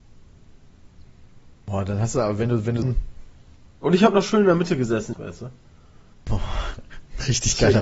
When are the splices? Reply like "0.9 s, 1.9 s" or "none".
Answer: 2.8 s, 5.1 s